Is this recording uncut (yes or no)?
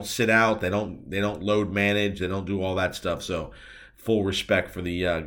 yes